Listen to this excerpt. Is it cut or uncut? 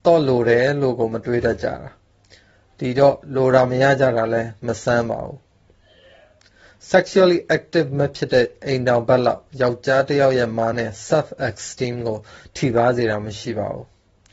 cut